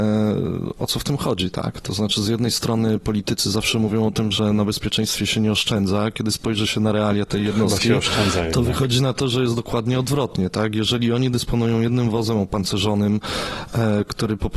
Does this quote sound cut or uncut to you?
uncut